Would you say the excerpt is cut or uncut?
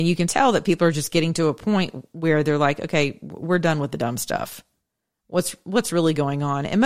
uncut